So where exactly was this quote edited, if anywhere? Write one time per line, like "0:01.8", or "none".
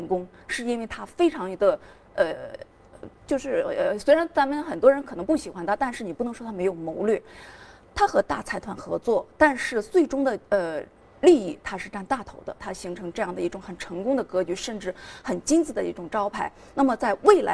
0:12.6